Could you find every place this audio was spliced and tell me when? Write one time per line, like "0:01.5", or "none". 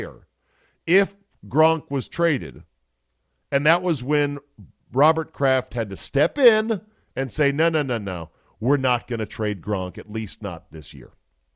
none